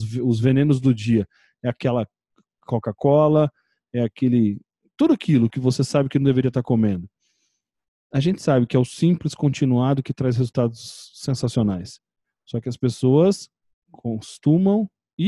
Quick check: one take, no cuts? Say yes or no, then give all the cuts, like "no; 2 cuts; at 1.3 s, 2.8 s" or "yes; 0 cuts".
yes; 0 cuts